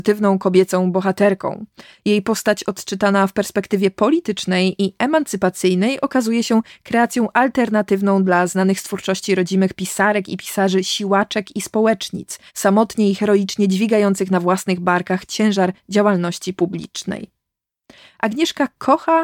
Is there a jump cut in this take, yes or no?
yes